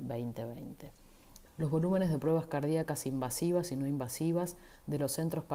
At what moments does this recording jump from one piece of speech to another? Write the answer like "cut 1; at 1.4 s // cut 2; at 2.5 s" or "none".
cut 1; at 1.5 s